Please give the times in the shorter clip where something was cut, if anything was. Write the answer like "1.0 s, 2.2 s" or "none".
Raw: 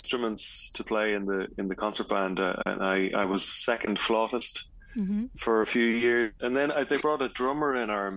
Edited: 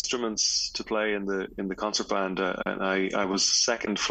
none